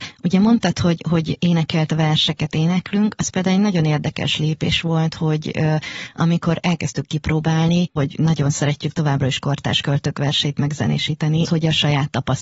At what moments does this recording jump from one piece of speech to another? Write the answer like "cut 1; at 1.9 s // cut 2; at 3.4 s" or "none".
cut 1; at 8.0 s // cut 2; at 11.4 s